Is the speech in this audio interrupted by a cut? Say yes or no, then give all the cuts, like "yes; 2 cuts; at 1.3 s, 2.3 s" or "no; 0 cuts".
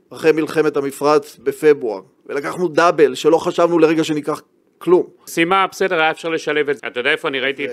yes; 2 cuts; at 5.3 s, 6.8 s